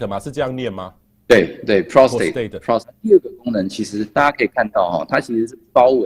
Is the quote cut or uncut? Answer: cut